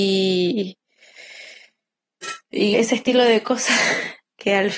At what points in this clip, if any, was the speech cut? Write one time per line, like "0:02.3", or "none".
0:02.7